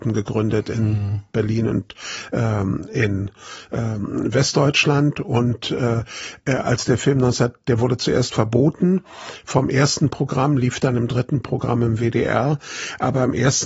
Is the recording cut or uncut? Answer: uncut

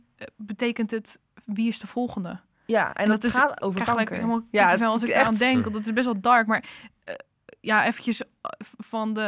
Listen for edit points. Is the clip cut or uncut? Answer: uncut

